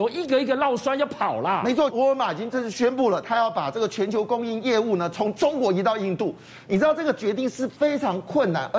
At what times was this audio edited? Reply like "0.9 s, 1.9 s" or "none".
1.9 s